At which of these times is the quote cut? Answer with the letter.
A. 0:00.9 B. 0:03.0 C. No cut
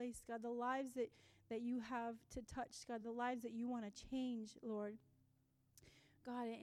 C